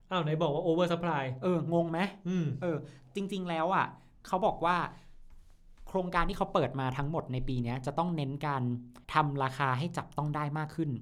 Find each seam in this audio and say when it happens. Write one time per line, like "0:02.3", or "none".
0:09.0